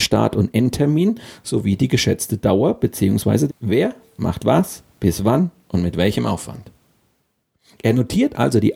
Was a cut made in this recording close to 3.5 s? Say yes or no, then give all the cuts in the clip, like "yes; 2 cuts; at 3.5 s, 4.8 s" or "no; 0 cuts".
yes; 1 cut; at 3.5 s